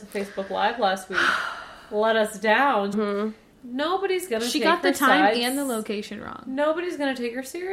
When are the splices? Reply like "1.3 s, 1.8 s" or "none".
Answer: 2.9 s